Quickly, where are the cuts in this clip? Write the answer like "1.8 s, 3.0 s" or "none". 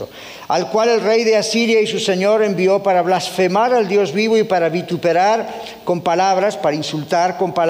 none